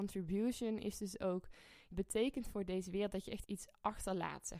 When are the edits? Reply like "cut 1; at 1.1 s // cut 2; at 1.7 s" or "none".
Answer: cut 1; at 1.9 s // cut 2; at 3.4 s